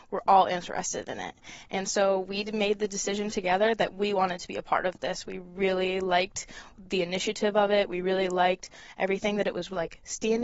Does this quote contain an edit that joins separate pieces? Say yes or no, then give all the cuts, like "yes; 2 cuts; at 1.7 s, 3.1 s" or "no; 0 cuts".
no; 0 cuts